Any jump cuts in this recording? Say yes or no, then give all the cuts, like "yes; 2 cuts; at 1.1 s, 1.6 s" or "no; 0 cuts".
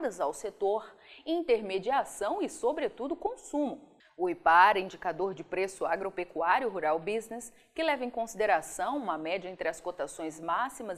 yes; 1 cut; at 4.0 s